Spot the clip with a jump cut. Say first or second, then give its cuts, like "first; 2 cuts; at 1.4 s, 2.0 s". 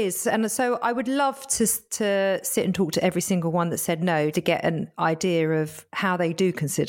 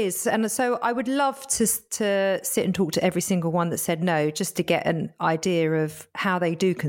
first; 1 cut; at 4.3 s